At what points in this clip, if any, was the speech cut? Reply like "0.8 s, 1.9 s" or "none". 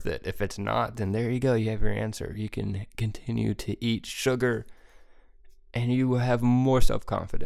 none